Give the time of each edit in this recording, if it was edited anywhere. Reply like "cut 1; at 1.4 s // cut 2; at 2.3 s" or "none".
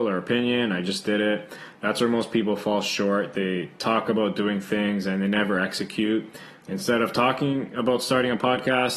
cut 1; at 6.6 s